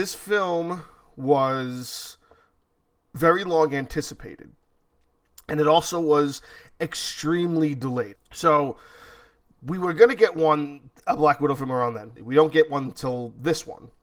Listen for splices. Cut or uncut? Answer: cut